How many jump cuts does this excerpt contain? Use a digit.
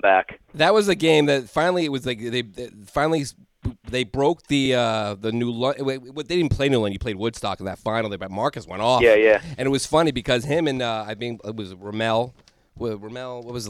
0